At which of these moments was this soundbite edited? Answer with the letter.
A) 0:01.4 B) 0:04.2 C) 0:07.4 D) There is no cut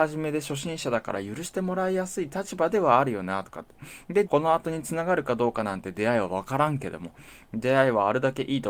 B